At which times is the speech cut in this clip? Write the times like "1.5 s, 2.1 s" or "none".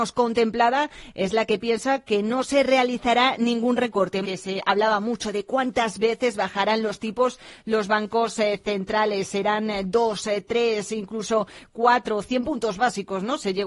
4.2 s